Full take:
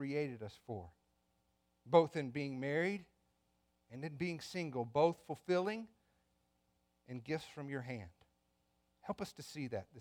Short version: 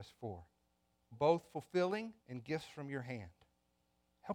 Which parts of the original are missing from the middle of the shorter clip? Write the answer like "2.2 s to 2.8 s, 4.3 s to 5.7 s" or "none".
1.6 s to 4.9 s, 5.9 s to 7.0 s